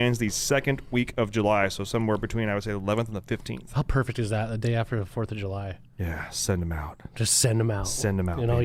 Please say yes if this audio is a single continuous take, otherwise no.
yes